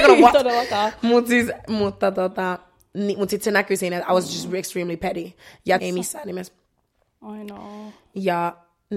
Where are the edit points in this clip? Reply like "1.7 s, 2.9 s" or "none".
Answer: 5.8 s